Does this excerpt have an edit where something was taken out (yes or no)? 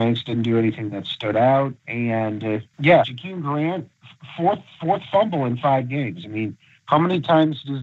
yes